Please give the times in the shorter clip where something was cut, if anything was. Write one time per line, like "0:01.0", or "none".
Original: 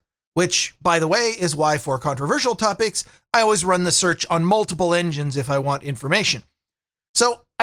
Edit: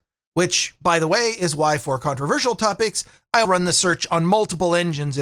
0:03.4